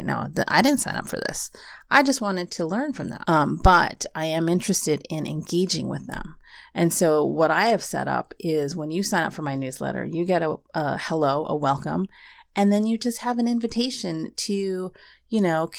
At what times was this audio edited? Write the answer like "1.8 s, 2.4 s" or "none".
3.2 s